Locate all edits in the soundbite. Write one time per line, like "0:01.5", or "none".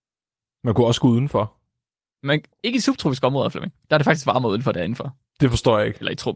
0:02.5